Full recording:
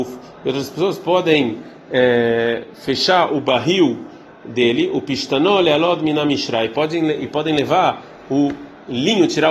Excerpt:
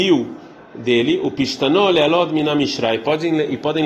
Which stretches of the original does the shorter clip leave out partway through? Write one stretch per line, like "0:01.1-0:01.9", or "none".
none

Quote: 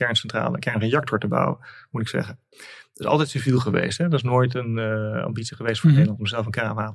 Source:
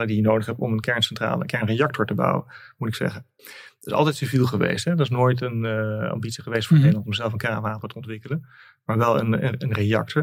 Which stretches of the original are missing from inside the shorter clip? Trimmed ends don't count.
none

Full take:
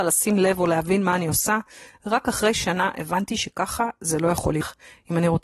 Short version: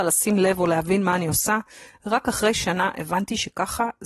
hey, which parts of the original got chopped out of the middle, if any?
none

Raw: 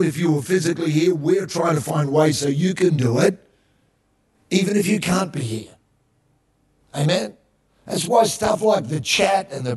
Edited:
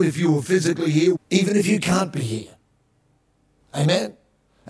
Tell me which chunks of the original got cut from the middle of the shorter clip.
0:01.2-0:04.4

